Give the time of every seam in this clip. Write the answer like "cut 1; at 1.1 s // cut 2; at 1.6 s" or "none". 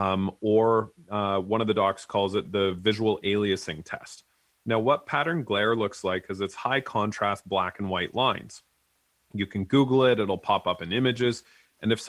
cut 1; at 2.5 s